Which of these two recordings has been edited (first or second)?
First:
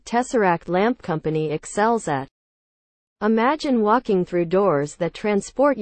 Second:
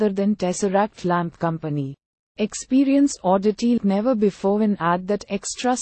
second